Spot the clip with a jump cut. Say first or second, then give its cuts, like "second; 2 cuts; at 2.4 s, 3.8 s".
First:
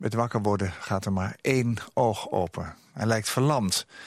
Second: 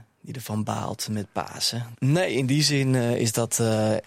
second; 1 cut; at 1.9 s